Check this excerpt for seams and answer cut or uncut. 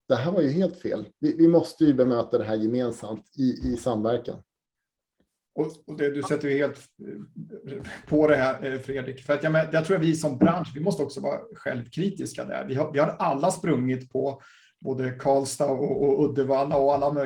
uncut